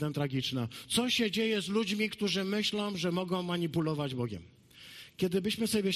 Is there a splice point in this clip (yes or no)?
no